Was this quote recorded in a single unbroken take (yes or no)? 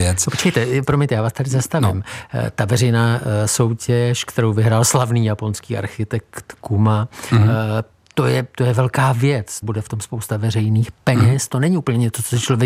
no